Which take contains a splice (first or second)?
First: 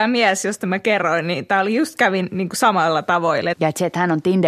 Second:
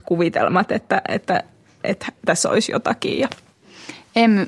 first